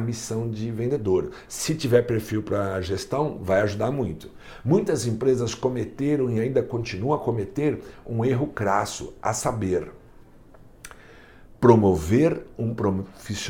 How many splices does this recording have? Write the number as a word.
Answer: zero